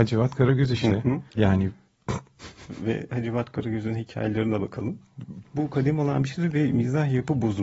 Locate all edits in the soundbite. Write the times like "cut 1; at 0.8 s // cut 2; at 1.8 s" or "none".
cut 1; at 1.3 s // cut 2; at 5.4 s